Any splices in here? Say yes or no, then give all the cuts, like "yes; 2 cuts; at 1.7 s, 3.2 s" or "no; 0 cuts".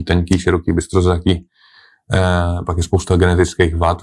no; 0 cuts